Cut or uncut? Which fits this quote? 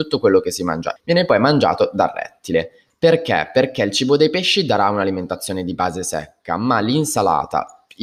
cut